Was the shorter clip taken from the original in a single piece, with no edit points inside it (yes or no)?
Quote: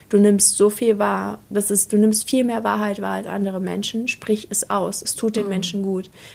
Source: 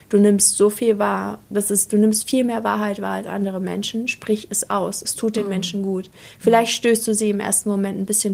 yes